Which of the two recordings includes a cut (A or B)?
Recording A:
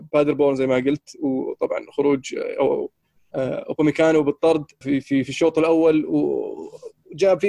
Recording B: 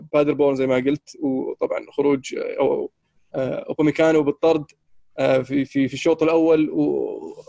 A